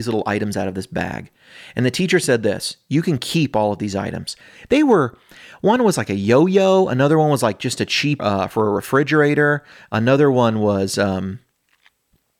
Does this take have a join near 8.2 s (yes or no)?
yes